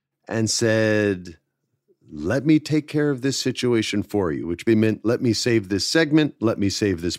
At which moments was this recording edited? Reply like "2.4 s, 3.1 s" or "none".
4.7 s